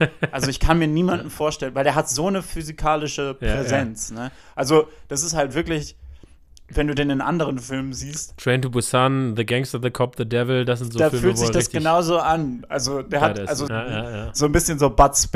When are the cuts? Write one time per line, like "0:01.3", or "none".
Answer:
0:13.7

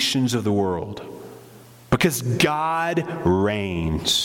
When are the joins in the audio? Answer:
none

